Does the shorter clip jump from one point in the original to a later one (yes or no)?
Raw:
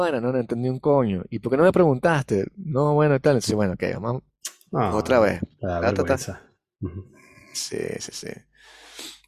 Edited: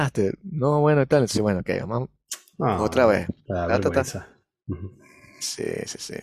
no